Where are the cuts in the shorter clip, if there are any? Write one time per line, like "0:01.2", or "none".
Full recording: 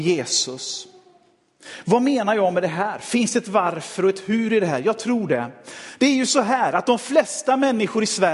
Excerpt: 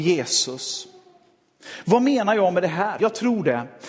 0:03.0